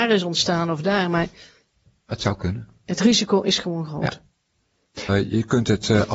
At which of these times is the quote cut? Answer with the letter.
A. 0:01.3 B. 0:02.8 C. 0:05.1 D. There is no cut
C